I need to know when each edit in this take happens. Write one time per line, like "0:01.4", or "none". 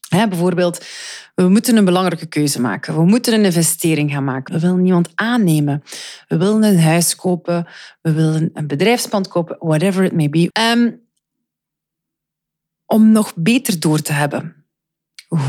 0:04.5
0:10.5